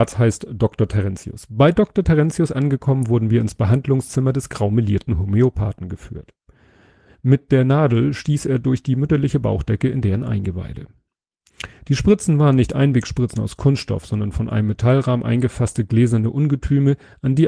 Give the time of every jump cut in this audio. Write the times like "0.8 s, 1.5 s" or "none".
7.1 s

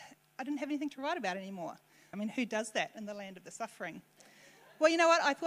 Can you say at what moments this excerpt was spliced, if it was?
2.1 s

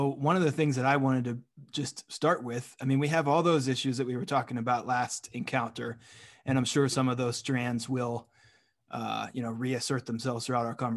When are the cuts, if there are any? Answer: none

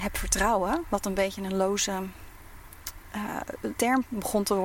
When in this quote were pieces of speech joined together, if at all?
3.7 s

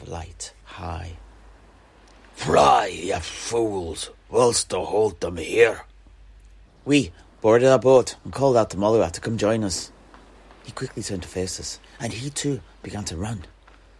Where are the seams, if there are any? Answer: 6.7 s

